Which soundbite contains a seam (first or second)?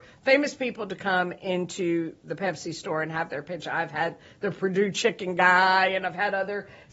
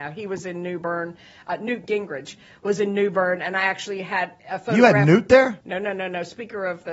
second